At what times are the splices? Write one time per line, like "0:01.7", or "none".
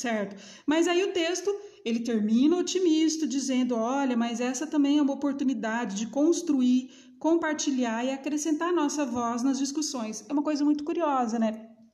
none